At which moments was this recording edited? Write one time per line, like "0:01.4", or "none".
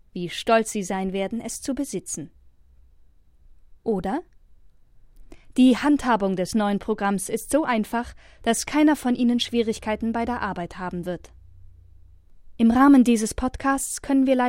none